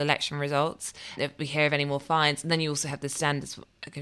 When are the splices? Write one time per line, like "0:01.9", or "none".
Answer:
0:01.2